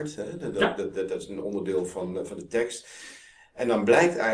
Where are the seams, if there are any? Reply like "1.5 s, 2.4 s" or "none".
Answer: none